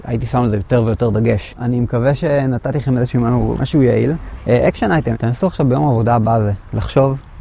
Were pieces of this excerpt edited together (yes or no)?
yes